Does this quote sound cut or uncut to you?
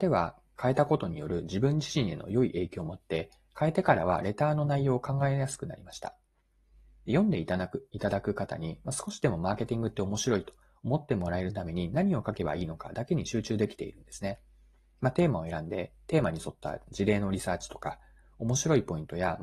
uncut